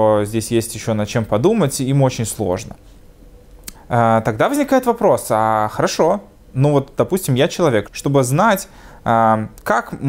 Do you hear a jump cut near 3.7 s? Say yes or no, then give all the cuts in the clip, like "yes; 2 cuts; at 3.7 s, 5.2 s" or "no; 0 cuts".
yes; 2 cuts; at 3.7 s, 7.8 s